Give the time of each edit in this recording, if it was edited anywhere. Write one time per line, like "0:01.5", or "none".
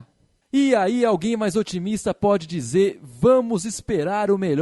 none